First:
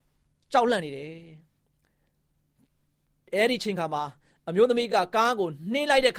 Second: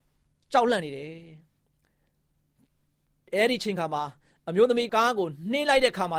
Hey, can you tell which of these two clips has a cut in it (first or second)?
second